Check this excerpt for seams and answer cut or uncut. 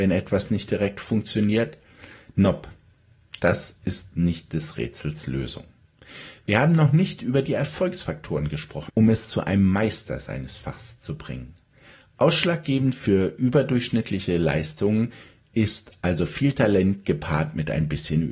cut